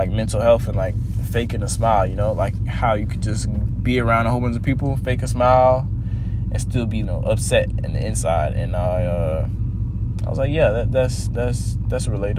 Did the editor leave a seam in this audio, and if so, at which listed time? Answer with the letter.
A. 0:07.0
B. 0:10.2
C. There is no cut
A